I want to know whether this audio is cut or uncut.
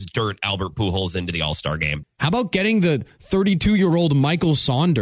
cut